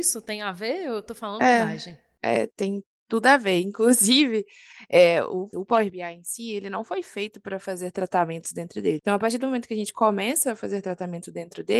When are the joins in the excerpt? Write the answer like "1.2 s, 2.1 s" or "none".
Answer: 5.5 s, 9.0 s